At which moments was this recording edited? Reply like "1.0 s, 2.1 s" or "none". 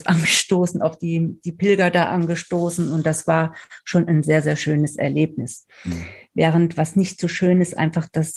none